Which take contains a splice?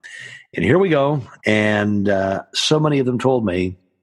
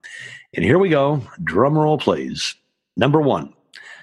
first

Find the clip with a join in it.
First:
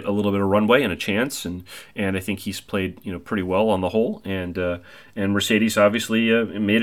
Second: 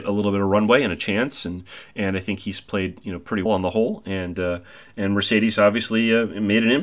second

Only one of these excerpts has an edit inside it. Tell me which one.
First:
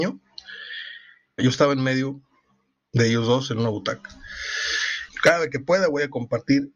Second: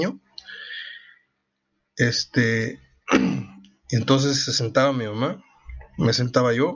first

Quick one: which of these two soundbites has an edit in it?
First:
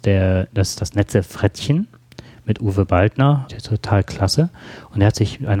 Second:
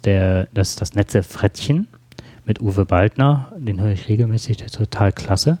first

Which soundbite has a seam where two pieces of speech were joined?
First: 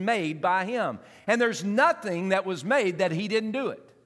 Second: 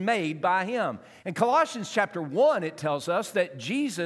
second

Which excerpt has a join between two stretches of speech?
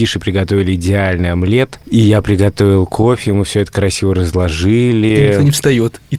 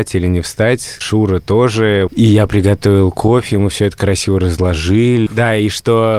second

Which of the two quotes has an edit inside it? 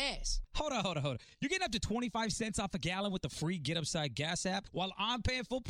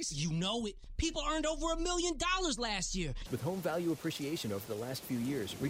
second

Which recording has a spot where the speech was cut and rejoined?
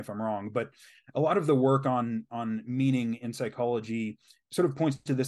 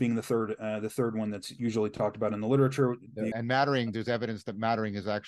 second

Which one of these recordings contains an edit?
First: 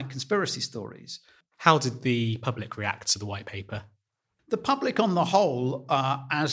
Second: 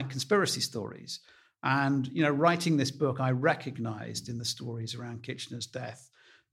first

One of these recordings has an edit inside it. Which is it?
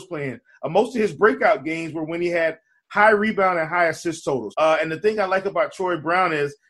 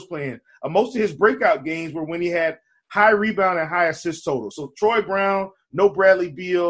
first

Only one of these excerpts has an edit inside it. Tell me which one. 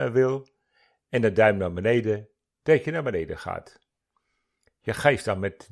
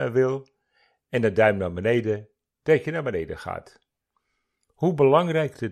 first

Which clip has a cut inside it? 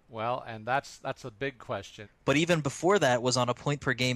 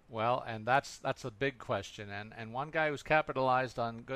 first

